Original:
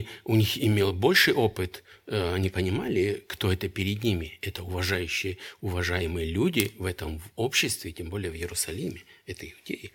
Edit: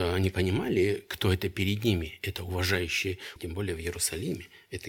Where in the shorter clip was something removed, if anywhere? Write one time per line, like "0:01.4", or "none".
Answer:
0:03.4